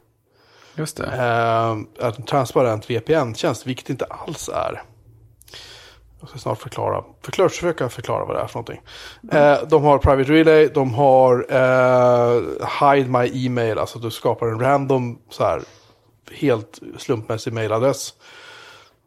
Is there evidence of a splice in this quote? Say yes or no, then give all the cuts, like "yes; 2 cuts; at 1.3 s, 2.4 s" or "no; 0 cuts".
yes; 1 cut; at 1.9 s